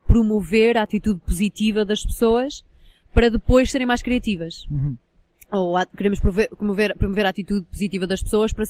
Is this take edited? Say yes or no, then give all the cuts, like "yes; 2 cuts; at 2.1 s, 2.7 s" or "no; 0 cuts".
no; 0 cuts